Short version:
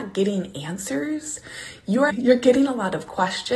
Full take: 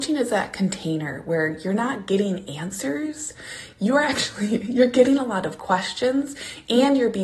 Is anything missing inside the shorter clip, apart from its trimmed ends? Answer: yes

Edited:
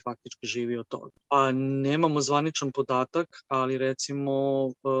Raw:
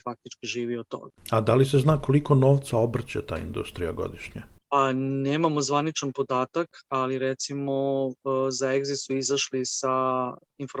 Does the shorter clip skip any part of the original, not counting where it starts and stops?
yes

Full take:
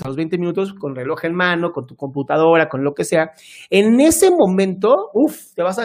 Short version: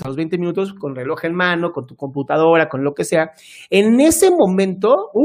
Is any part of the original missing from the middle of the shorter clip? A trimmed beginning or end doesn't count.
no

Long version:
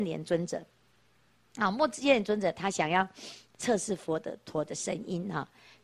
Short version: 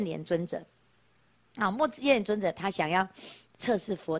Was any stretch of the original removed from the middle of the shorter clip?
no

